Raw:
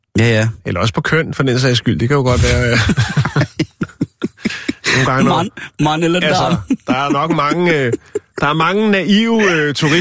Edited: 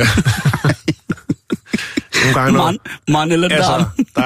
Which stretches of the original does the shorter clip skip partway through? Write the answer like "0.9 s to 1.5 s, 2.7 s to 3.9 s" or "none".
none